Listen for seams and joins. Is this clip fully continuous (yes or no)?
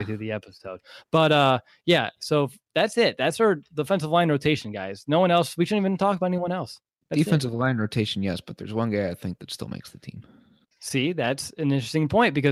yes